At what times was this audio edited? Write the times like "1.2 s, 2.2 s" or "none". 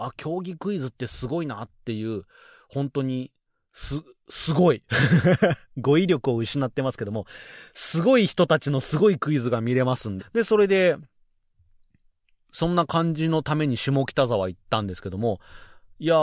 10.2 s